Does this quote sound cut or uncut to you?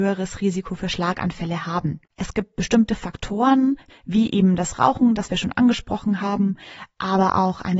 cut